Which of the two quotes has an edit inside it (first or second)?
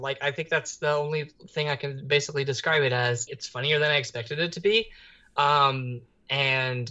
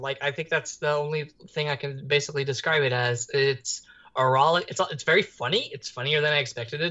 first